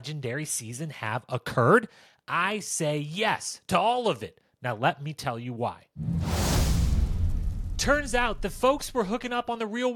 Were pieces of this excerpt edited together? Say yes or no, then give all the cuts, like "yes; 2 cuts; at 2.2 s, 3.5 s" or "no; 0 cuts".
no; 0 cuts